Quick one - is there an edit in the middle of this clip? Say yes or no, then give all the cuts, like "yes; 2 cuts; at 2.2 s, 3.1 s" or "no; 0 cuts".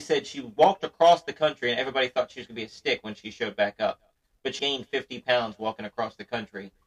yes; 1 cut; at 4.6 s